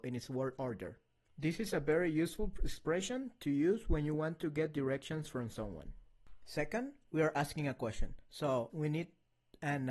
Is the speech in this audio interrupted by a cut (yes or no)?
yes